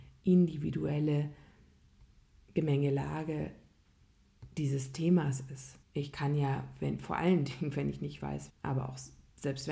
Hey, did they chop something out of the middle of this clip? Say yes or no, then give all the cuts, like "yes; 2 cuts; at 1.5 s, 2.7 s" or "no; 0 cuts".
yes; 2 cuts; at 5.8 s, 8.5 s